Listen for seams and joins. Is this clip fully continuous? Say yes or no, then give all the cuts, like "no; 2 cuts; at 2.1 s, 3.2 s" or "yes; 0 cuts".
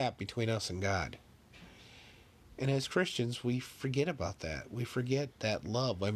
yes; 0 cuts